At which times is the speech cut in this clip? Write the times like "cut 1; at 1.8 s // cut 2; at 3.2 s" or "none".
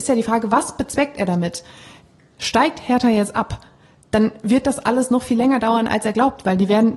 cut 1; at 2.4 s